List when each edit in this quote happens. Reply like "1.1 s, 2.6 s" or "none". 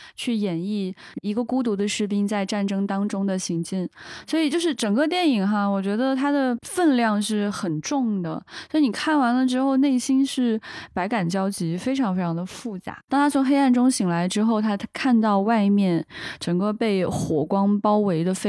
13.1 s